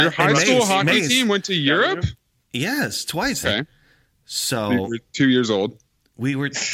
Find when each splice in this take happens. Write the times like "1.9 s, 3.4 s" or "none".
3.4 s